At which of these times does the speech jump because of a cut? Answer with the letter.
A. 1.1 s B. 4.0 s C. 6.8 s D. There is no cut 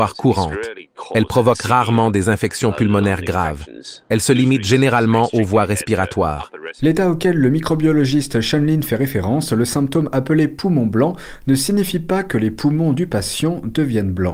C